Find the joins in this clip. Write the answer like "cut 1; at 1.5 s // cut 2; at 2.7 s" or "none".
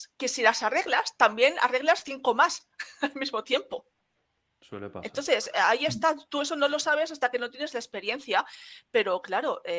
none

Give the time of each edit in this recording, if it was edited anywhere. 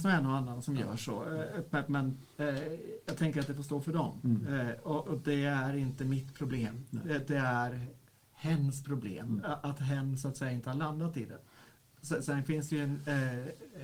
cut 1; at 2.3 s // cut 2; at 5.0 s

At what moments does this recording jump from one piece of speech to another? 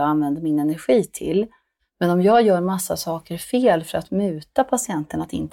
cut 1; at 1.8 s

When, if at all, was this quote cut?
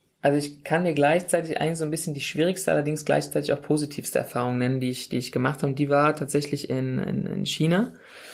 none

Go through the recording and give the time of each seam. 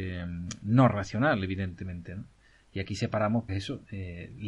cut 1; at 3.5 s

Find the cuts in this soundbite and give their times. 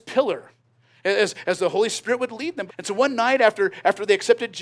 cut 1; at 2.7 s

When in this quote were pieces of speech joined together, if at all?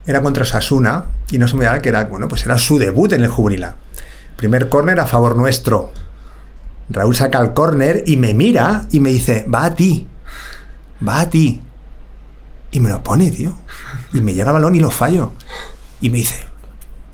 none

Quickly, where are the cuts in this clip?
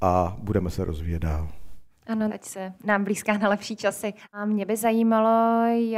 cut 1; at 2.3 s // cut 2; at 4.2 s

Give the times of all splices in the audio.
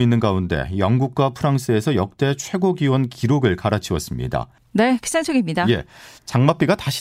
cut 1; at 4.6 s

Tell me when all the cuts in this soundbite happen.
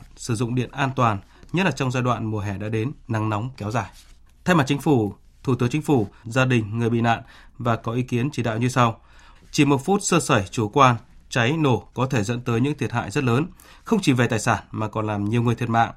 cut 1; at 4.3 s // cut 2; at 6.2 s // cut 3; at 9.4 s

